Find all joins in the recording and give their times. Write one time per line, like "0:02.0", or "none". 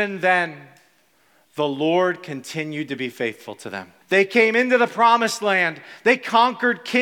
0:04.0